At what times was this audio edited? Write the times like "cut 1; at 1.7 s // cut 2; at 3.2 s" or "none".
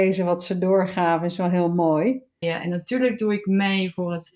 cut 1; at 2.4 s